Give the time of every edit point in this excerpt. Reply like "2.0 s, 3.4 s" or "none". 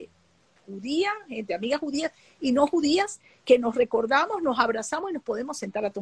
none